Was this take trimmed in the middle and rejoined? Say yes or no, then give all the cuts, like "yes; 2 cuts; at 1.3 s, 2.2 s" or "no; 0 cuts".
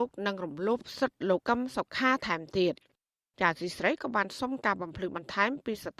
yes; 1 cut; at 1.4 s